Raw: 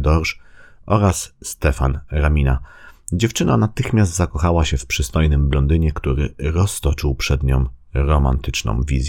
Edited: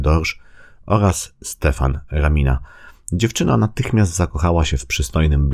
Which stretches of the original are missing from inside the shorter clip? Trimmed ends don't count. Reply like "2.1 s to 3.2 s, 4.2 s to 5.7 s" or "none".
none